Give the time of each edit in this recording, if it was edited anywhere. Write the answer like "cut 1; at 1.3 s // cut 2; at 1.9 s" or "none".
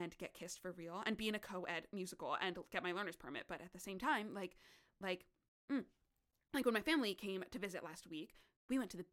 none